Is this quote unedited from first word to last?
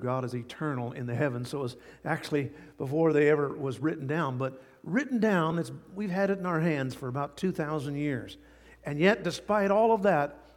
yes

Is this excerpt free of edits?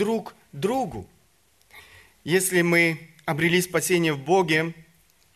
yes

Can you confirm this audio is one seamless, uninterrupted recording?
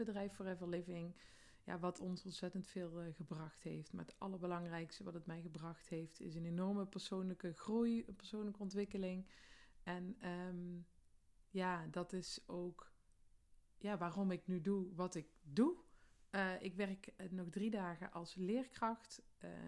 yes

